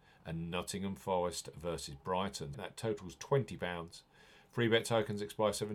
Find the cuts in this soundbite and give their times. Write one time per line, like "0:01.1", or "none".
0:02.5

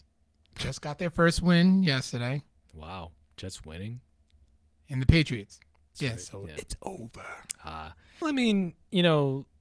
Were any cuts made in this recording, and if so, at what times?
0:05.9
0:08.2

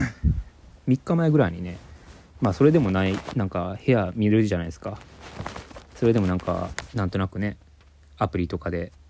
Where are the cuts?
none

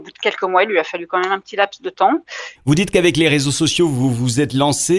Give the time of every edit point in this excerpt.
0:02.6

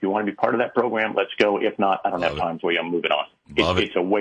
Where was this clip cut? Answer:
none

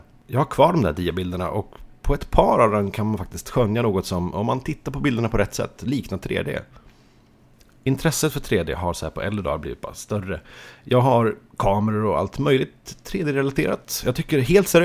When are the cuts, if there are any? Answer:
none

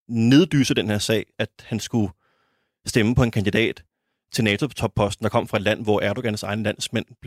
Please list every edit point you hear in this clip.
0:01.3

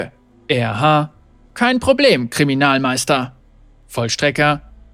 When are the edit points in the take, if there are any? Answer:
none

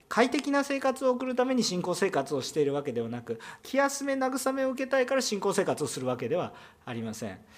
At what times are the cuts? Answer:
0:03.6

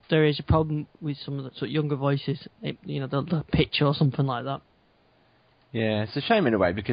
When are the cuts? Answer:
0:02.8

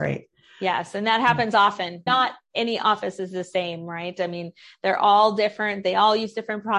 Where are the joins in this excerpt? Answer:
0:02.1

